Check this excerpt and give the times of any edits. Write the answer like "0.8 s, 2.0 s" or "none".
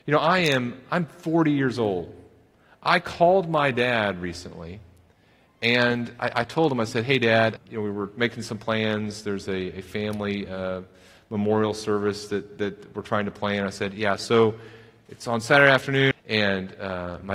7.6 s, 16.1 s